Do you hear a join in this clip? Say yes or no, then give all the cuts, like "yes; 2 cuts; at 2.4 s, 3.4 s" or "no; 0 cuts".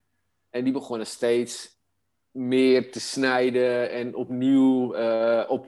no; 0 cuts